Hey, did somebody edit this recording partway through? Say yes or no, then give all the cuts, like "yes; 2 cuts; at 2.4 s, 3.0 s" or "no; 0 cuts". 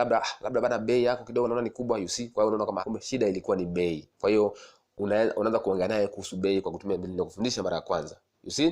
yes; 2 cuts; at 2.8 s, 4.1 s